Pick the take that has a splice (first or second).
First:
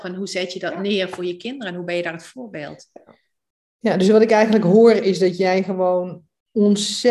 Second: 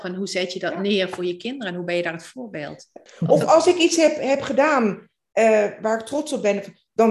second